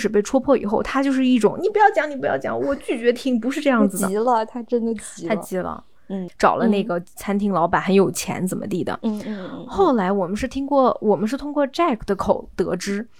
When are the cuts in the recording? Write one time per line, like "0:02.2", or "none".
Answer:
0:06.3